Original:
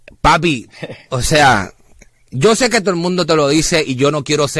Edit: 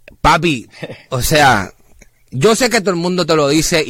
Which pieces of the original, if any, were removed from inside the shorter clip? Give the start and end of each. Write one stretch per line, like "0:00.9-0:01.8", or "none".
none